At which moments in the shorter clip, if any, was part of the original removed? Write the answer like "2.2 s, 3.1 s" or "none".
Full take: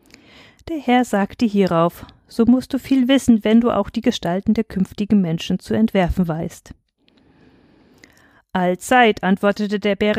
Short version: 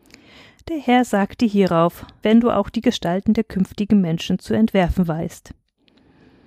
2.2 s